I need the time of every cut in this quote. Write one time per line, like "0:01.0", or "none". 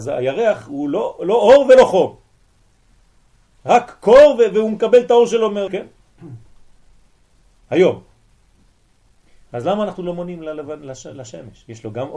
0:05.7